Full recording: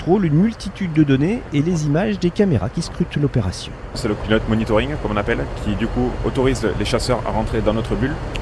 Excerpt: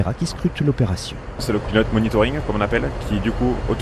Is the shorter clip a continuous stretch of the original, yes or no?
yes